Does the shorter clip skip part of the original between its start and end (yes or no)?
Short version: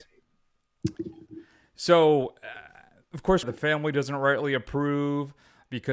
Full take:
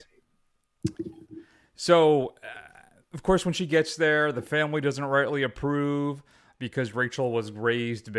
yes